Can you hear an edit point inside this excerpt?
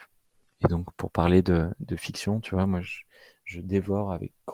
no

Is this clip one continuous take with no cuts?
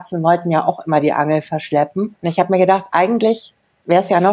yes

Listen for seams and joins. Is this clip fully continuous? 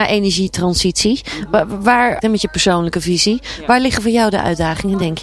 no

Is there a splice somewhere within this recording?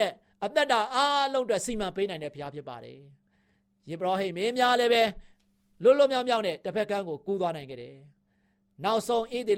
no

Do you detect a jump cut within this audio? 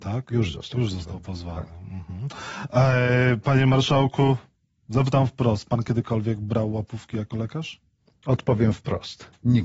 no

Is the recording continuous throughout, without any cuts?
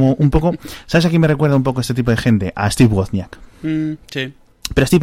yes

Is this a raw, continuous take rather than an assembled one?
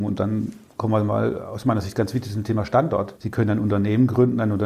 no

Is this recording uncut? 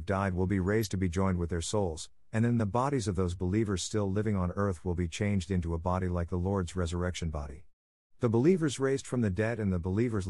yes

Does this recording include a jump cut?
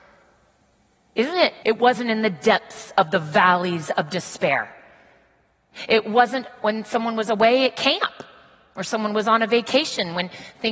yes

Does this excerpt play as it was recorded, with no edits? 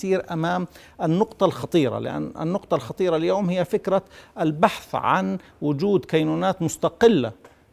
yes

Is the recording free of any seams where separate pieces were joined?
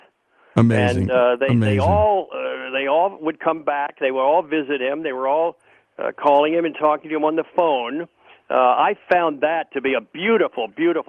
yes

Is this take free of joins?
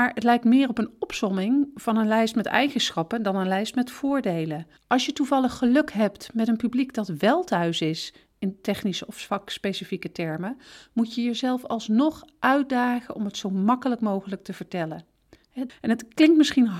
no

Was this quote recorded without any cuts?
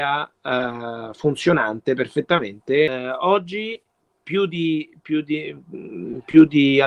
yes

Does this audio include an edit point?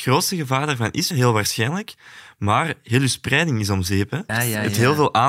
yes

